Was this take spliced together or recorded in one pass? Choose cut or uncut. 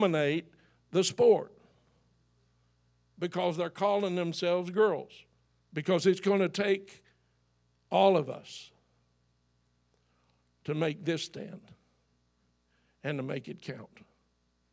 cut